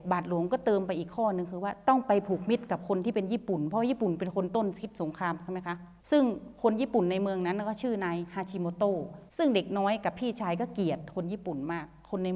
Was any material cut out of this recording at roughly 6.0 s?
yes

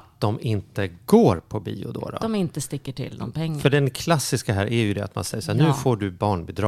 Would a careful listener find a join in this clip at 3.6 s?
no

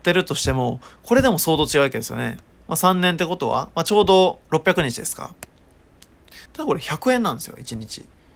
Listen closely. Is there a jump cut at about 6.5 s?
yes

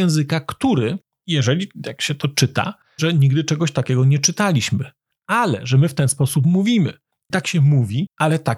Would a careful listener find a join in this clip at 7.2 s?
no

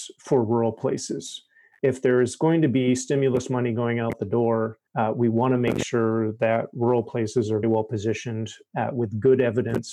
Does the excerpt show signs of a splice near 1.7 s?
no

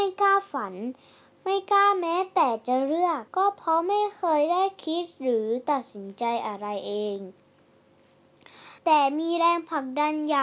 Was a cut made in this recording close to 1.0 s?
no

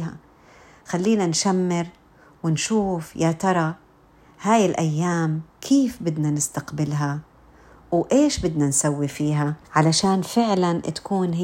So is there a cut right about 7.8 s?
no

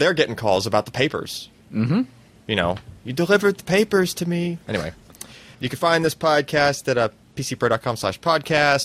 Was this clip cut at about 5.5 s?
yes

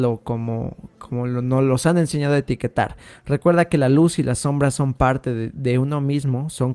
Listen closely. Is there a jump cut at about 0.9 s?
no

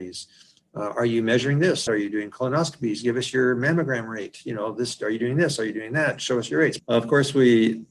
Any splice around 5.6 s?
no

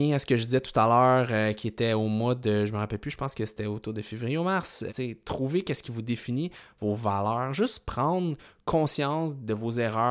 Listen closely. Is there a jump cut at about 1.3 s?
no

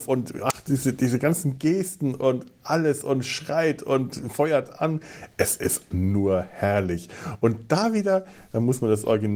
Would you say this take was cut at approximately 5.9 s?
yes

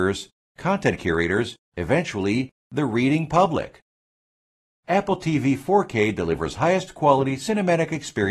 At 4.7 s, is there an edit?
yes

